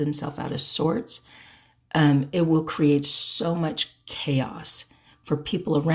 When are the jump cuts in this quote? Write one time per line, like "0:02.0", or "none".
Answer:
none